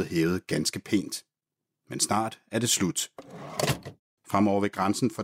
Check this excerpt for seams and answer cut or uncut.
cut